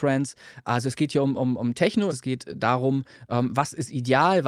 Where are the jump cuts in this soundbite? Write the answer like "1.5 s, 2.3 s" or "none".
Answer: 2.1 s